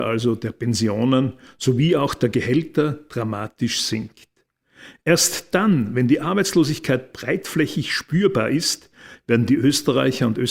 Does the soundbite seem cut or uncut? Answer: cut